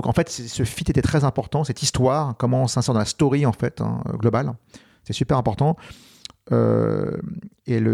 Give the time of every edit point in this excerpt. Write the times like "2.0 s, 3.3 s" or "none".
none